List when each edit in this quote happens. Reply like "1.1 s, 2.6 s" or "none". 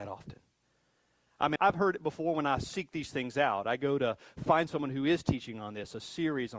1.6 s